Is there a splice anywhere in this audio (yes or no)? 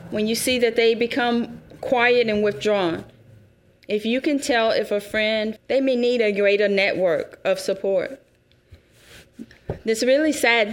yes